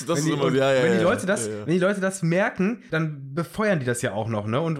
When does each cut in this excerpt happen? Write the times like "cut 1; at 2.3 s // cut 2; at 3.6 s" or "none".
cut 1; at 2.9 s